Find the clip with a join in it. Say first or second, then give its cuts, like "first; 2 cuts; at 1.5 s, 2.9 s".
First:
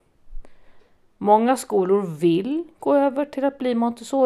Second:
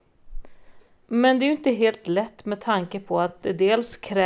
second; 1 cut; at 1.0 s